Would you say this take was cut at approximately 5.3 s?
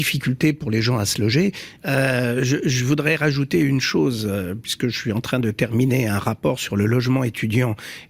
no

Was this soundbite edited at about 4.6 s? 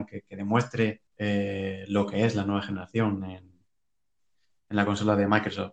no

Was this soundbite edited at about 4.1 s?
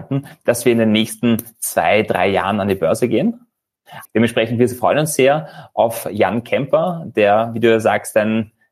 yes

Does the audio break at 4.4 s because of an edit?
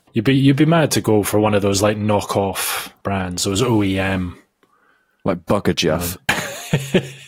no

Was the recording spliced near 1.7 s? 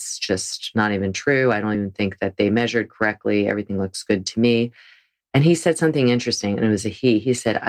no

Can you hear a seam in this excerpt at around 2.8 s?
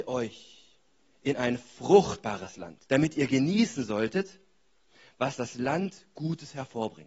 yes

